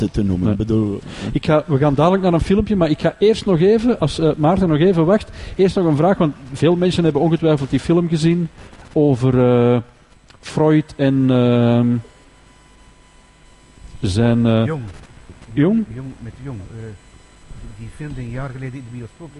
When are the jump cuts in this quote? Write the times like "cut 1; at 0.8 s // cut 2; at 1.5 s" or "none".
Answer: none